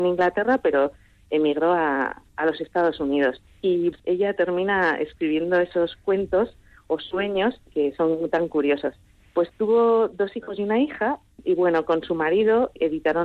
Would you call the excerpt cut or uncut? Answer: uncut